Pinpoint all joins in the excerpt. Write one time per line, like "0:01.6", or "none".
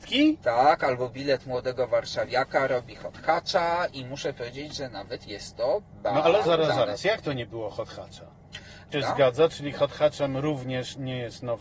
0:06.4
0:08.9